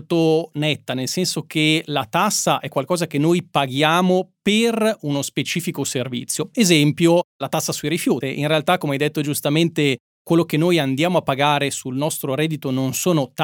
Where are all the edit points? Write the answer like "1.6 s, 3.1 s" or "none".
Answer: 8.2 s